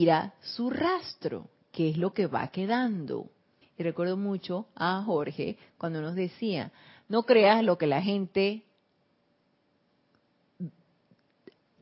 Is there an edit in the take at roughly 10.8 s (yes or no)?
no